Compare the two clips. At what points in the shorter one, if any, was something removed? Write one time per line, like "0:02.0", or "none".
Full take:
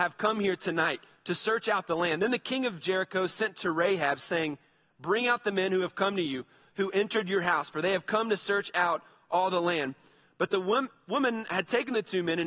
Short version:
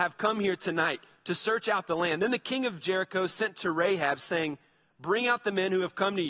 none